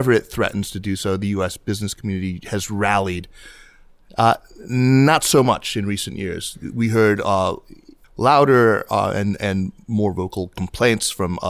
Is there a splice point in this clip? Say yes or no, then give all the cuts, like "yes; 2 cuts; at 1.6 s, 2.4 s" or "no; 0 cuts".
yes; 1 cut; at 8.0 s